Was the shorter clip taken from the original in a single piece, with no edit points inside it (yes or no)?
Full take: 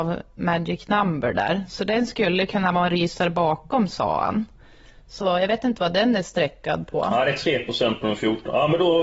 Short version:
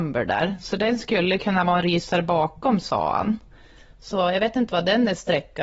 yes